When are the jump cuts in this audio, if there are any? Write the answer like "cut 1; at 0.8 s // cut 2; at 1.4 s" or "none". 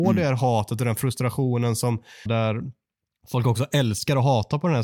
cut 1; at 2.3 s